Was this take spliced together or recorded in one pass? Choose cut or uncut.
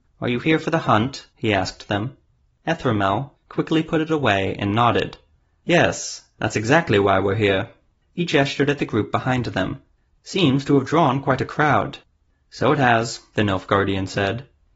cut